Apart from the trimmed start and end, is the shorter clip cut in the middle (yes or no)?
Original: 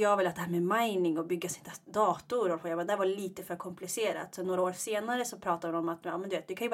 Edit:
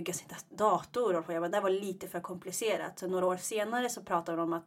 no